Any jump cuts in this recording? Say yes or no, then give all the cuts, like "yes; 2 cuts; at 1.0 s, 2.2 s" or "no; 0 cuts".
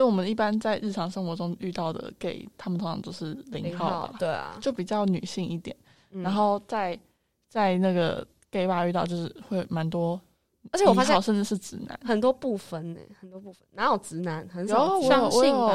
no; 0 cuts